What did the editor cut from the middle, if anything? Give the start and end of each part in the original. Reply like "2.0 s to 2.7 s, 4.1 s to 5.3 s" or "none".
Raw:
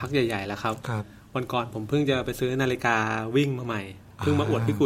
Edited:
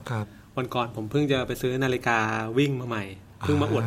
none